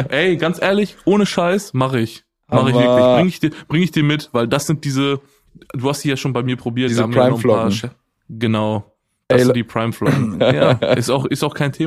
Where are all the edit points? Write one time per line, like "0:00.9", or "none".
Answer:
0:10.4